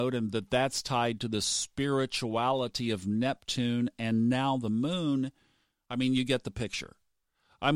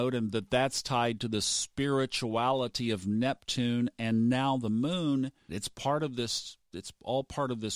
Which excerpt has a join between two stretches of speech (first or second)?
second